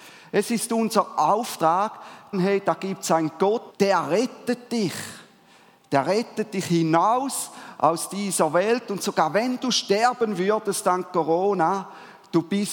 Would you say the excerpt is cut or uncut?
cut